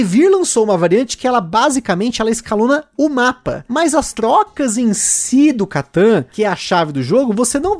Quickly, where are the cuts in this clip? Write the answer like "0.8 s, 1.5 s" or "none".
none